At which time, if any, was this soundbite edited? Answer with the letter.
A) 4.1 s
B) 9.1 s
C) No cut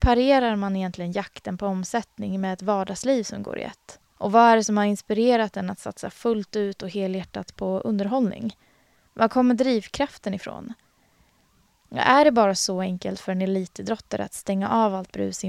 A